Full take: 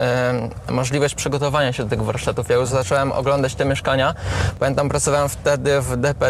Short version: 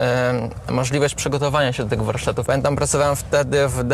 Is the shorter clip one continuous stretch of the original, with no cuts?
no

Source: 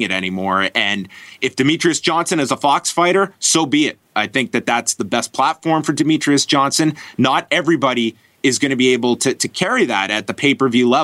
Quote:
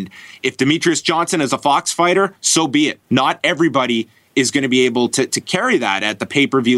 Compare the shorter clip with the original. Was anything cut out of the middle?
yes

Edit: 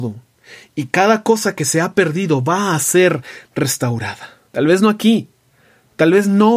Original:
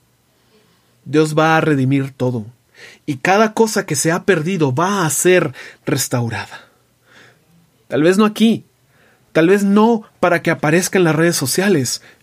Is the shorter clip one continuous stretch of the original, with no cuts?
no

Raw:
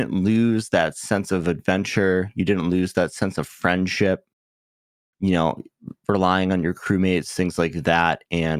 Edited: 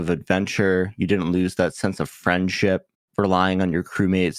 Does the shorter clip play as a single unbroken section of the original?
no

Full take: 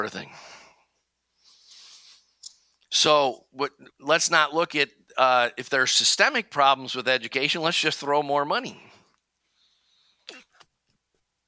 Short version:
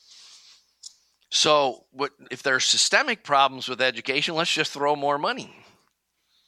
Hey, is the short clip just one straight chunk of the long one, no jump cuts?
no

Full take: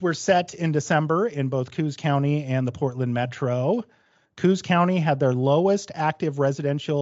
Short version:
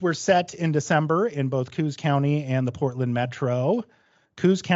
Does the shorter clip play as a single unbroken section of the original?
yes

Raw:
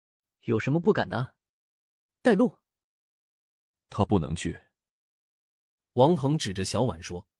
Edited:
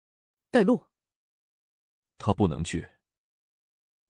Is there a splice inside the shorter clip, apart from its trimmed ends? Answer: no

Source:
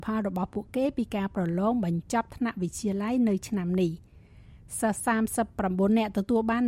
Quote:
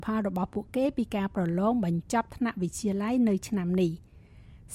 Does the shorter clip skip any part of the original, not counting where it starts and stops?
no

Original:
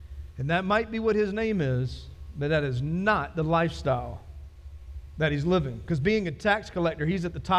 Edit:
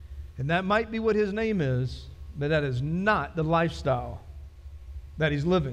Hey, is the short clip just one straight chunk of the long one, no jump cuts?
yes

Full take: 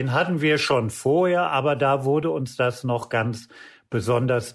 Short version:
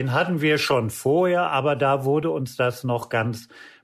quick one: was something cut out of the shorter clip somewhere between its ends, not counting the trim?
no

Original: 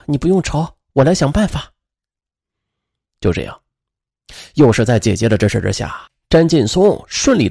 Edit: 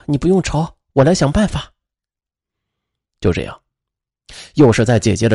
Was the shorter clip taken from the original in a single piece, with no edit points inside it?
yes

